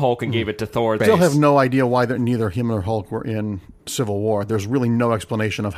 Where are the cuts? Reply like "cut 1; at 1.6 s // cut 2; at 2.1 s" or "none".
cut 1; at 1.0 s // cut 2; at 3.8 s